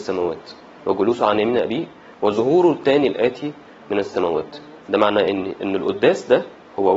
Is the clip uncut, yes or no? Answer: no